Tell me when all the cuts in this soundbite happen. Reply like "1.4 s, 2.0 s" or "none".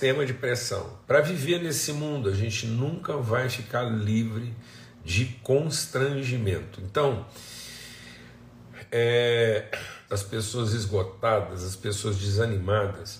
1.0 s, 10.1 s